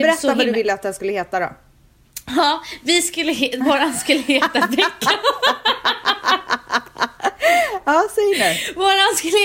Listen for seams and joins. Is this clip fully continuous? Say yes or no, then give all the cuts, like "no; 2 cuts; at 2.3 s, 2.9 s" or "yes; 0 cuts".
yes; 0 cuts